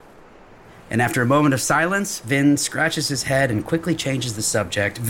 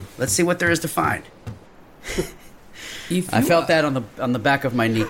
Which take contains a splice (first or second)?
second